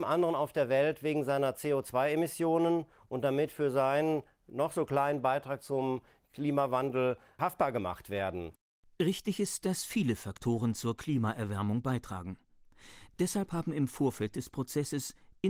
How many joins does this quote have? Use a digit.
0